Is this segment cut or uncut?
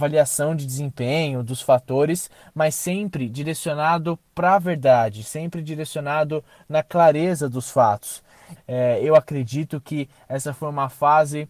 cut